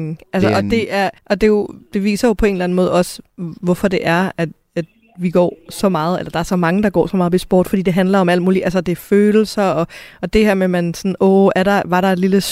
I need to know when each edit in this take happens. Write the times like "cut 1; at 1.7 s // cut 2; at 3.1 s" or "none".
cut 1; at 1.2 s